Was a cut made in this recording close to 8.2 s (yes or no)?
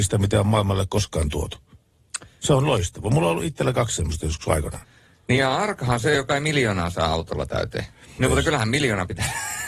yes